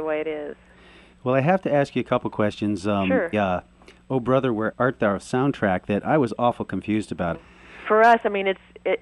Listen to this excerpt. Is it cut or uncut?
cut